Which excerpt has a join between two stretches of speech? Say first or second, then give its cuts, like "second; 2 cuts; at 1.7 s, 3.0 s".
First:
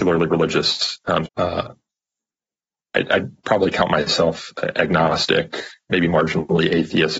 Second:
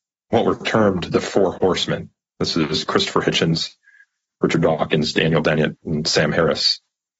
first; 2 cuts; at 1.2 s, 5.9 s